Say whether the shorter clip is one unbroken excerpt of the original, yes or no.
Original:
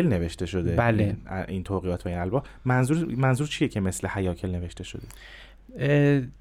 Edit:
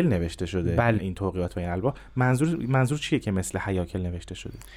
no